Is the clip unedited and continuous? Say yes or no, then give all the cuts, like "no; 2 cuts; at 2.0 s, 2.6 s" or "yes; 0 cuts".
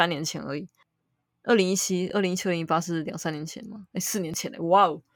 yes; 0 cuts